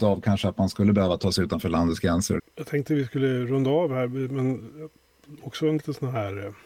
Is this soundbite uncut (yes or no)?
no